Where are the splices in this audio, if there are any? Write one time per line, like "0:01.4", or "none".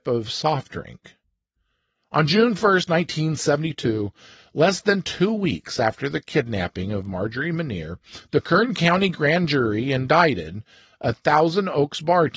none